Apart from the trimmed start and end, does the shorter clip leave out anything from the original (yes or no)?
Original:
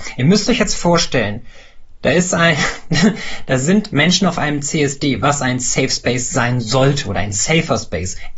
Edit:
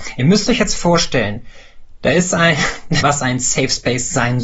yes